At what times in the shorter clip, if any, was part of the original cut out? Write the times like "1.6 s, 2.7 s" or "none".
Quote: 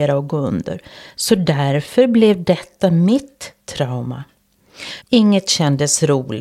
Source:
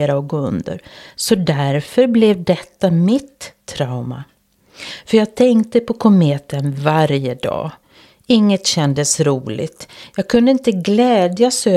5.0 s